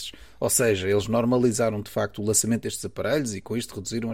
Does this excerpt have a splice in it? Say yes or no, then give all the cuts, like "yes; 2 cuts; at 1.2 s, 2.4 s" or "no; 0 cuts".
no; 0 cuts